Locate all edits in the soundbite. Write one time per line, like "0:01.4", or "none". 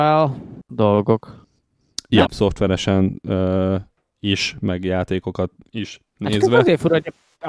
0:02.2